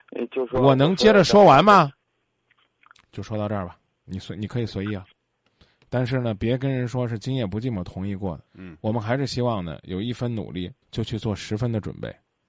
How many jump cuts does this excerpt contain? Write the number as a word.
three